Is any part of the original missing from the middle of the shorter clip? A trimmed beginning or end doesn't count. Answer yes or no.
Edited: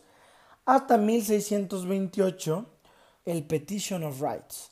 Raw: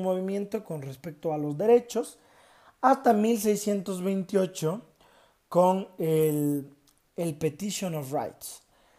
yes